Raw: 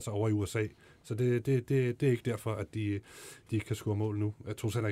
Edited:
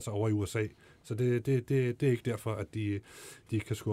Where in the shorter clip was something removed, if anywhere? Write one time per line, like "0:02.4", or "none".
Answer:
none